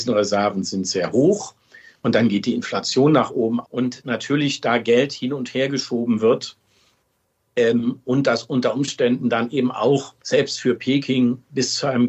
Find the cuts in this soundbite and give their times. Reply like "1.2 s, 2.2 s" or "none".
2.0 s, 3.6 s, 10.2 s